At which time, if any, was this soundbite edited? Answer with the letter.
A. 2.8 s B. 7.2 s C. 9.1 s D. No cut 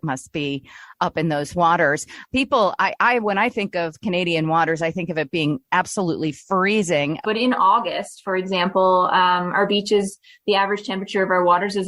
B